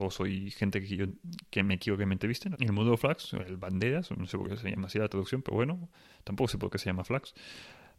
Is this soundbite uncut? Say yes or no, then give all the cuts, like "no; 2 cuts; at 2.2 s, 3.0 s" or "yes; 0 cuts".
no; 1 cut; at 2.5 s